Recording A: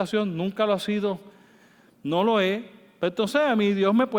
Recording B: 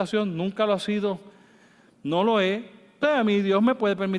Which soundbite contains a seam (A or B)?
B